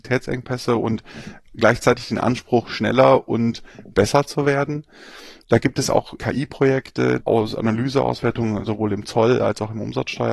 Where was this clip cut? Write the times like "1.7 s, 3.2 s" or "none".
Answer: 6.2 s, 7.2 s